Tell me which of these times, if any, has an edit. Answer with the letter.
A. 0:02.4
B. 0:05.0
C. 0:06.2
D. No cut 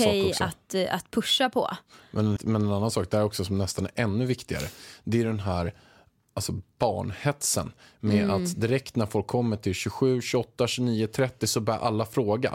A